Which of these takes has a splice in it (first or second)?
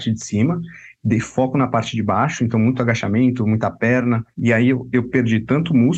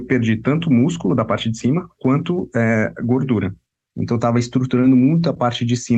second